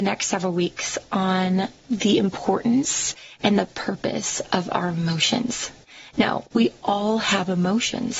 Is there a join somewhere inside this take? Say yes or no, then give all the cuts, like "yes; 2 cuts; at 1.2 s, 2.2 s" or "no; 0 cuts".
yes; 1 cut; at 6.4 s